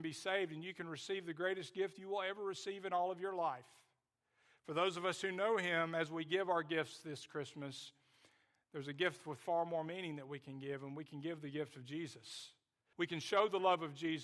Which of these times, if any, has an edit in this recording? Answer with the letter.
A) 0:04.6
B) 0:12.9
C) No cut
B